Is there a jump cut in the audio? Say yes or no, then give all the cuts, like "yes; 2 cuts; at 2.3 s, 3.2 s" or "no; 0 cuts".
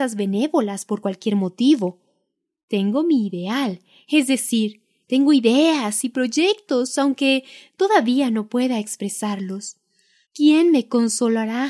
yes; 2 cuts; at 5.0 s, 10.2 s